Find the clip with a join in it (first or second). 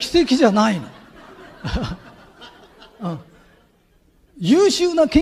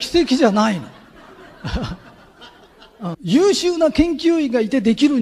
second